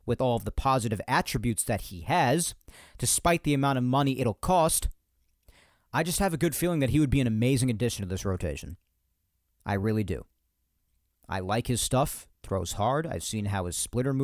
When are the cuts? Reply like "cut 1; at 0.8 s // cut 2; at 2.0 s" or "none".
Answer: none